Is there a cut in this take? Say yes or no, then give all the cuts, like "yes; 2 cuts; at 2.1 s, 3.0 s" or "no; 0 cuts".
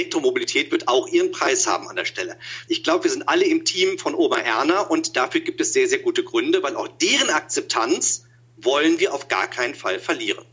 no; 0 cuts